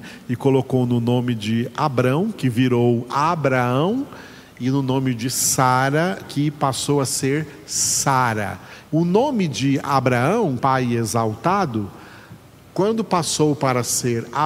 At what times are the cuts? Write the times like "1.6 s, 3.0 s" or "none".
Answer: 6.2 s, 8.9 s, 10.6 s